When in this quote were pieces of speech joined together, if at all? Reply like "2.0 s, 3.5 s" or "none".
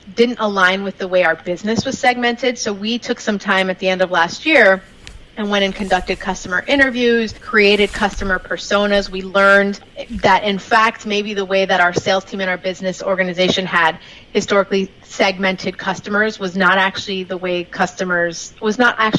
none